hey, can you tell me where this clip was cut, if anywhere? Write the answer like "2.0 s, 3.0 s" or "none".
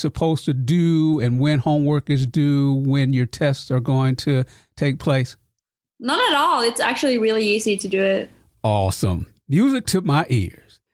none